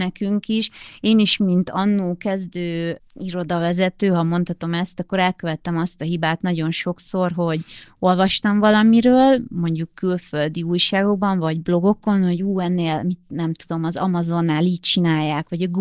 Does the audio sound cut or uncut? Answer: uncut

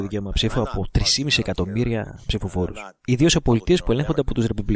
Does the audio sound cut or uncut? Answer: uncut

